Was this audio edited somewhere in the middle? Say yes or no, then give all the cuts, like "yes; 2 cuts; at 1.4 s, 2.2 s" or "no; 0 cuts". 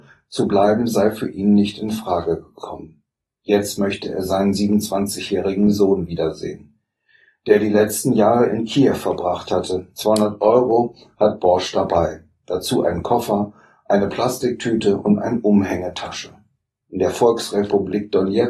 no; 0 cuts